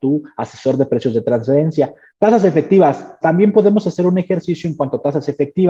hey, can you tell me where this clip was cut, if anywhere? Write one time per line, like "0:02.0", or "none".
0:02.1
0:03.2